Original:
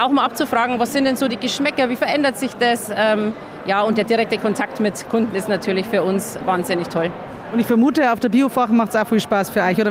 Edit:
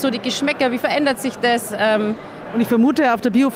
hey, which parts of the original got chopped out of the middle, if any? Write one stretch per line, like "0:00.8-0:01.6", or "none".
0:03.6-0:07.4